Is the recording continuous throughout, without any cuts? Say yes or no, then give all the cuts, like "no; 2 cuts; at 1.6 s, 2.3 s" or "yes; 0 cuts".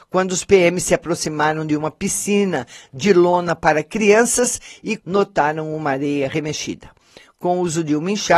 no; 1 cut; at 5.0 s